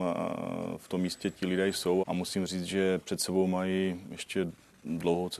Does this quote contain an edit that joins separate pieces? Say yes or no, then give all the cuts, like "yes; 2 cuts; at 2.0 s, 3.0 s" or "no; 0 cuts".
yes; 1 cut; at 2.0 s